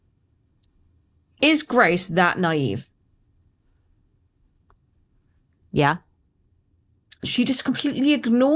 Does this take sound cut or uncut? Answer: cut